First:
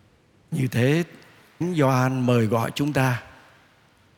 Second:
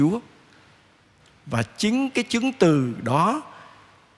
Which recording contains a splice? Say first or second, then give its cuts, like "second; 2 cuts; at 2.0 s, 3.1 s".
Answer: first; 1 cut; at 1.6 s